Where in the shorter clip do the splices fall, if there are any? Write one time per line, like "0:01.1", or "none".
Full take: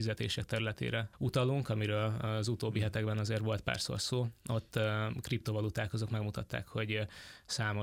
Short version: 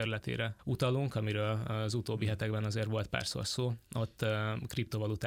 none